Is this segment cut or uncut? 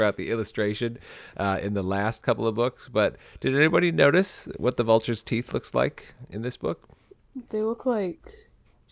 uncut